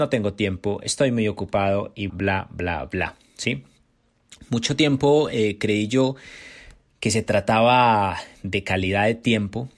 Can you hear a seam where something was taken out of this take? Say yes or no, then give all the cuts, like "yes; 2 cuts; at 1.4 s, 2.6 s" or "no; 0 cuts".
yes; 1 cut; at 2.1 s